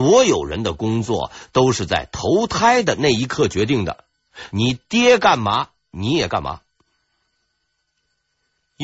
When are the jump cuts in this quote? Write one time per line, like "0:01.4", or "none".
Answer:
none